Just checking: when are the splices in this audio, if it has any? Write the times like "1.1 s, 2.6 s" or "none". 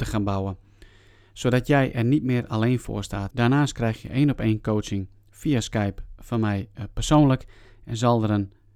3.3 s